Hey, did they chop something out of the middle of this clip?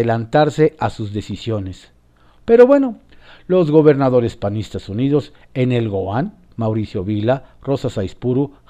yes; 3 cuts; at 2.4 s, 6.5 s, 7.6 s

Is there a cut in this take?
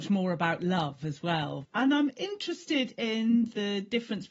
yes; 1 cut; at 1.6 s

